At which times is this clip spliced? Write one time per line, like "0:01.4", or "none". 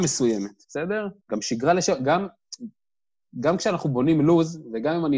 0:01.2

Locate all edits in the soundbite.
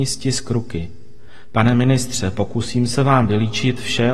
none

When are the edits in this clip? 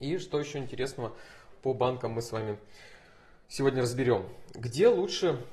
none

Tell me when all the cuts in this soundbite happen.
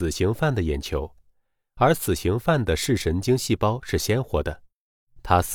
none

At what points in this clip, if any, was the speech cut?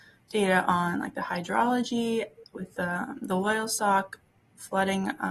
none

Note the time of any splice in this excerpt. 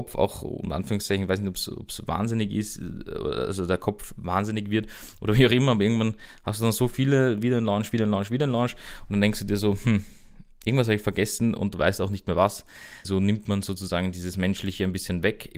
0:13.0

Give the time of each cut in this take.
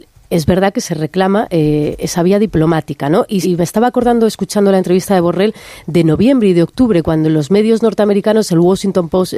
0:03.4

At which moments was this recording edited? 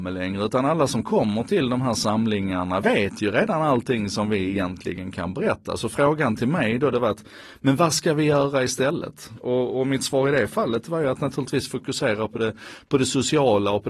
none

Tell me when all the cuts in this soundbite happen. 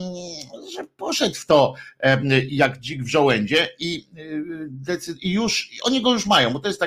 none

